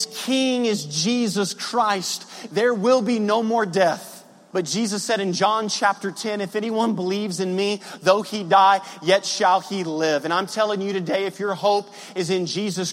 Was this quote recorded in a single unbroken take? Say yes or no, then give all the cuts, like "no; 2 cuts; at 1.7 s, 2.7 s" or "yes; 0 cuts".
no; 1 cut; at 4.5 s